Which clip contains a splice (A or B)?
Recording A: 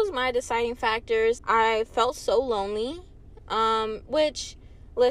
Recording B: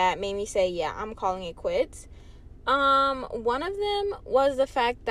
A